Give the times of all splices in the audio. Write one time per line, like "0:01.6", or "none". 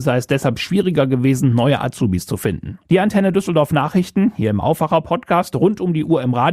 0:02.8